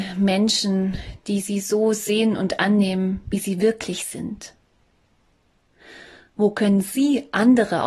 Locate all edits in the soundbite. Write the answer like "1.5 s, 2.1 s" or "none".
none